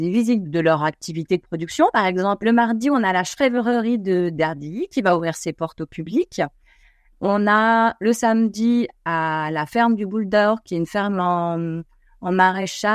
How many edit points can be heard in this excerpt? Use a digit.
0